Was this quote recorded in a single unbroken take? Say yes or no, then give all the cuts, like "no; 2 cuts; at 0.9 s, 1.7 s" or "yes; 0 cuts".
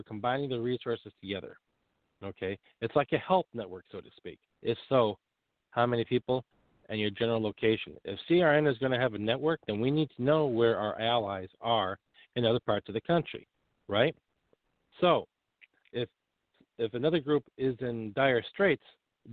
no; 1 cut; at 4.5 s